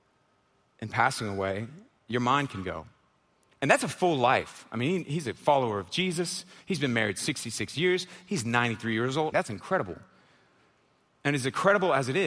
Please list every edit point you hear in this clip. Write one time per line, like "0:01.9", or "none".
0:09.3